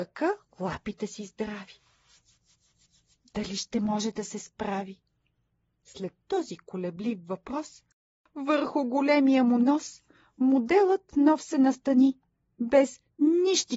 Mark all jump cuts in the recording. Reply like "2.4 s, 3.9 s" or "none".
none